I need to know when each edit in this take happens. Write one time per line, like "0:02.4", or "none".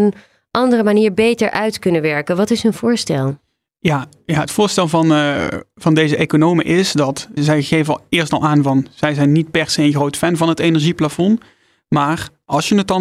0:07.4